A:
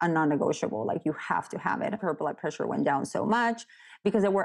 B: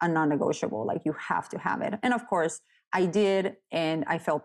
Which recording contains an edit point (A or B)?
A